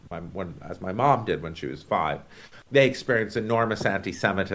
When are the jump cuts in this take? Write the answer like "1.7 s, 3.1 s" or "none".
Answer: 2.7 s